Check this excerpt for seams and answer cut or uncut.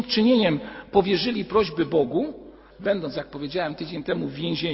cut